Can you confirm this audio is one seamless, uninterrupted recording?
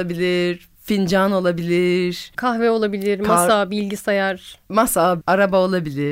no; 1 cut; at 5.2 s

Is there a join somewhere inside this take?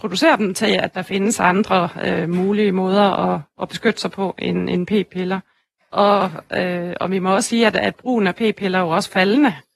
yes; 1 cut; at 5.8 s

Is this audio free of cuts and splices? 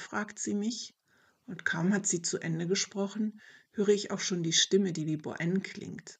yes; 0 cuts

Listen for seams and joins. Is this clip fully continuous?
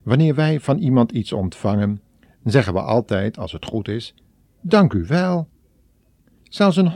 yes; 0 cuts

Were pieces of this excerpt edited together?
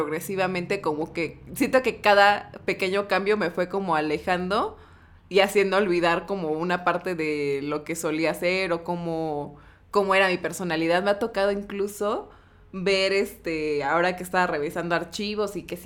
no; 0 cuts

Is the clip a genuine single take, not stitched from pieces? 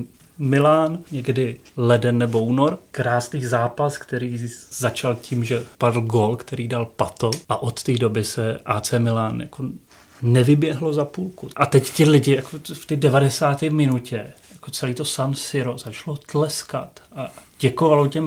no; 1 cut; at 14.4 s

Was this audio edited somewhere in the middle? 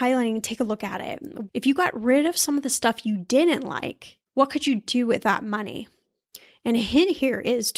yes; 2 cuts; at 1.5 s, 4.3 s

